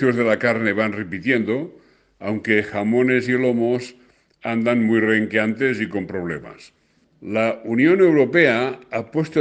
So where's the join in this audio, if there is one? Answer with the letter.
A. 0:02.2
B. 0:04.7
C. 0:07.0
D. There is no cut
C